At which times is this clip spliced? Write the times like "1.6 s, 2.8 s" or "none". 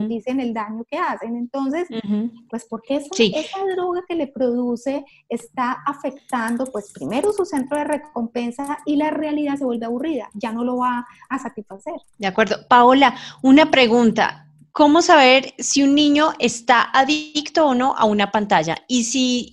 2.5 s